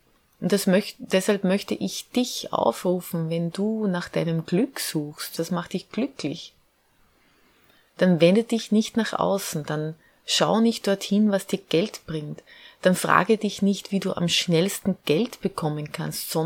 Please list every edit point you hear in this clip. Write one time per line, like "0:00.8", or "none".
0:05.4